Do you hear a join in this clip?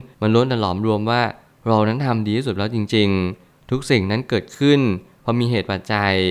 no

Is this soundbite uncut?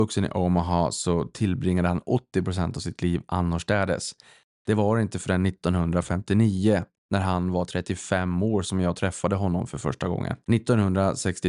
no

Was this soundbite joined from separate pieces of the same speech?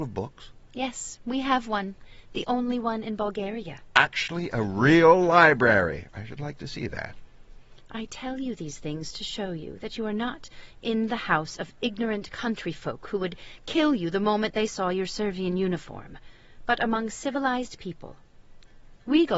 no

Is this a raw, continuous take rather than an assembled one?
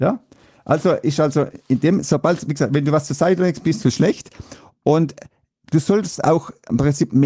yes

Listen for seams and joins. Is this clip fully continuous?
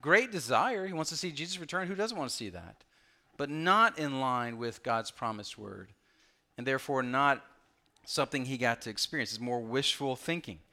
yes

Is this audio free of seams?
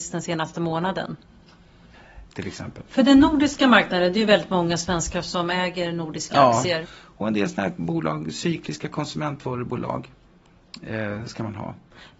no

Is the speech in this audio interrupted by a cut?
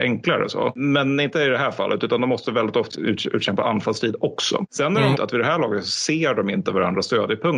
yes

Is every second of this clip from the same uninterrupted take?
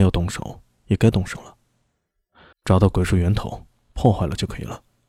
no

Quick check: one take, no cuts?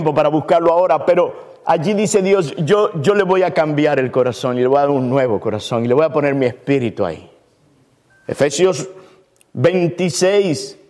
no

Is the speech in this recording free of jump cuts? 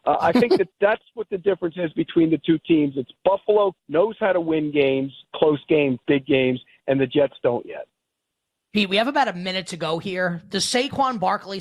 yes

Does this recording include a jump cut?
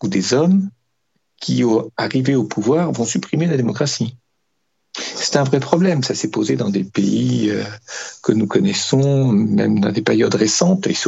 no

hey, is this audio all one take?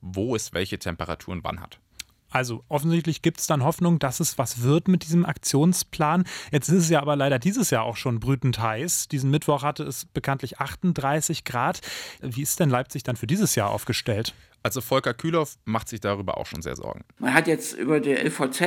no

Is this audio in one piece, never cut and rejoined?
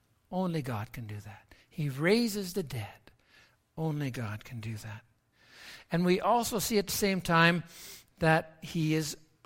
no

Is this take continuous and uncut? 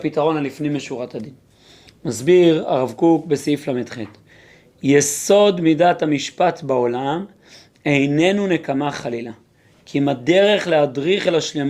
yes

